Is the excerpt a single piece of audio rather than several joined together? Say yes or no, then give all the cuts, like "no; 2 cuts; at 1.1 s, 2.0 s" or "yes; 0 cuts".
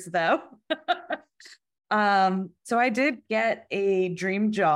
yes; 0 cuts